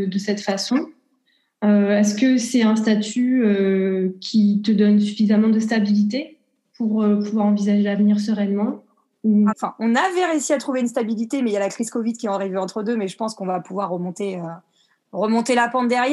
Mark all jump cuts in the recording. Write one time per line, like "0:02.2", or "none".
0:09.5